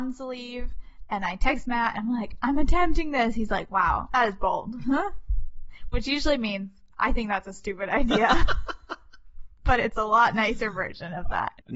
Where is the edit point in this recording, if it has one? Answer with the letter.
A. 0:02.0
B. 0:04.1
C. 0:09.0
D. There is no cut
B